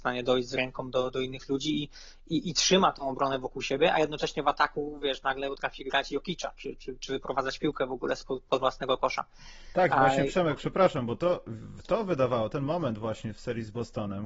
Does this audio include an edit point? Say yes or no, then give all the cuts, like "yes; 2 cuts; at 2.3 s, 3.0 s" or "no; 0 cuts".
no; 0 cuts